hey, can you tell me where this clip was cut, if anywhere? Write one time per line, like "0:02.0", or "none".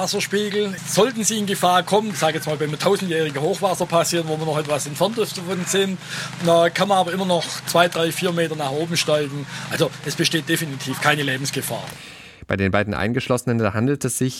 0:02.1